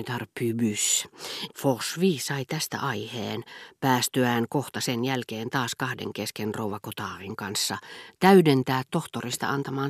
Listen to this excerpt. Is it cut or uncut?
cut